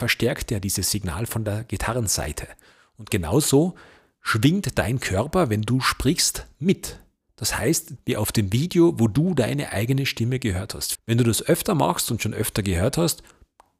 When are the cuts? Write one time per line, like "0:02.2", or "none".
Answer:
0:08.0
0:10.9

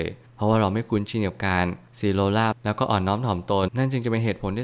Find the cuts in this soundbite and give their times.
0:03.7

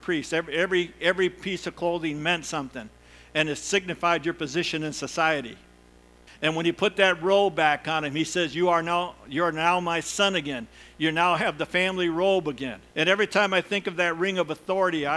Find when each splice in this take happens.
0:06.3
0:12.9

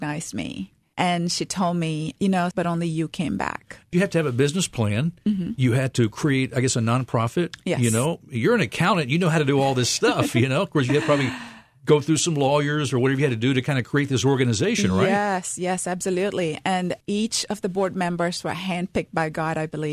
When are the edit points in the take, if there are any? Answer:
0:02.5

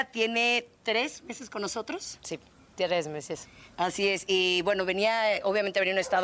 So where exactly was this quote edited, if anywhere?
none

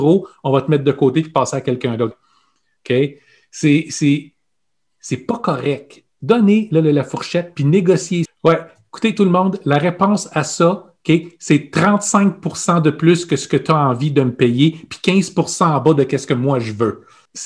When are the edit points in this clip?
0:02.1
0:08.3

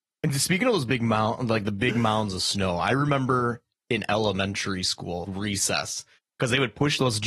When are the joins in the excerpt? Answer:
0:05.2

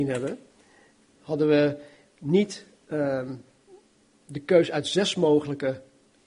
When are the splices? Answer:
0:01.2

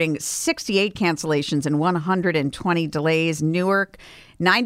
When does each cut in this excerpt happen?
none

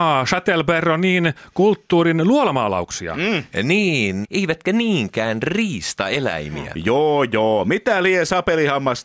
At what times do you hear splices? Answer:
0:04.2

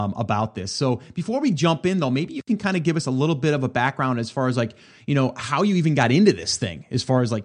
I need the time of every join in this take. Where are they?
none

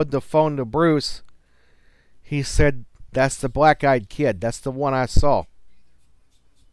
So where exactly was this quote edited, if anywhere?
none

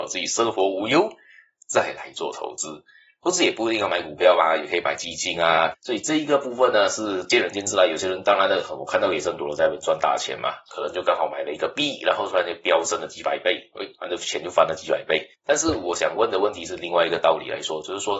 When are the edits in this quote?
0:05.7

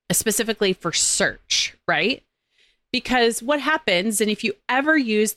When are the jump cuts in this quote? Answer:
none

